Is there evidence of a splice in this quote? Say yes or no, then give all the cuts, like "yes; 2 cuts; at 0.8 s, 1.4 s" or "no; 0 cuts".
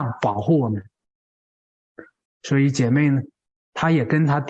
yes; 1 cut; at 2.3 s